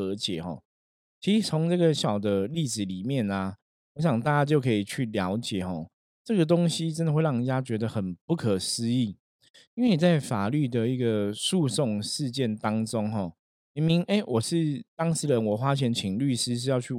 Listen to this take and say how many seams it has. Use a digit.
1